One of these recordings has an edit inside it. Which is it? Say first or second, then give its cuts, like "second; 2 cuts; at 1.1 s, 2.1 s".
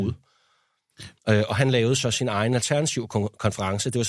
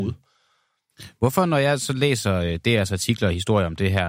first; 1 cut; at 1.2 s